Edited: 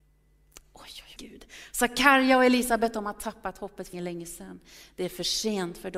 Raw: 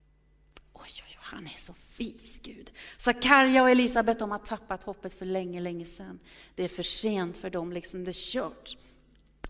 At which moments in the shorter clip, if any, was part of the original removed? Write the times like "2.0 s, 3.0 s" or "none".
1.2 s, 3.9 s